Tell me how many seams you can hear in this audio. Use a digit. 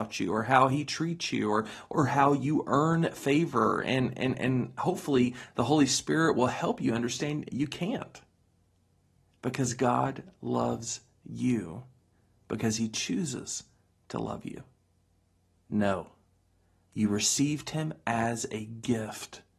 1